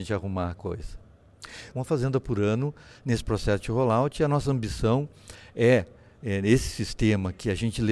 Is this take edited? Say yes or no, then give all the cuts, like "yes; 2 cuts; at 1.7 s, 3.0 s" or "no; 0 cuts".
yes; 1 cut; at 1.7 s